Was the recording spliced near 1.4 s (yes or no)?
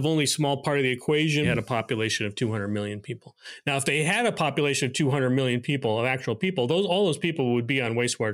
yes